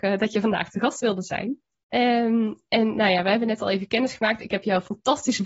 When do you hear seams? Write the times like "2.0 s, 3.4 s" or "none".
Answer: 1.7 s